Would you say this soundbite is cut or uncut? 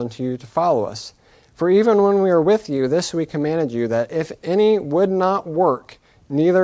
uncut